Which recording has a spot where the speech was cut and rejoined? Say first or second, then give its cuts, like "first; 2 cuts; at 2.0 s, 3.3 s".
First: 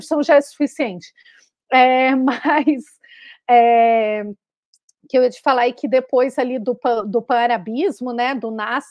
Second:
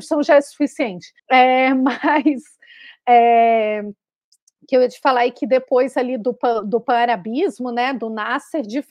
second; 1 cut; at 1.2 s